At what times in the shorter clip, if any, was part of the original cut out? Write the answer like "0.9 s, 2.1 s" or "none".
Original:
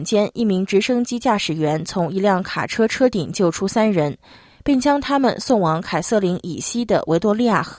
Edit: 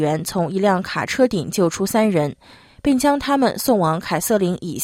1.1 s